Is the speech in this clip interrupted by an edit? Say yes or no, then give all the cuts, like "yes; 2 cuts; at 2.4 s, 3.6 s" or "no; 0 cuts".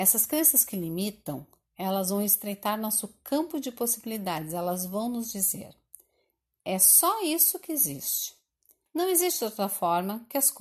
yes; 1 cut; at 8.9 s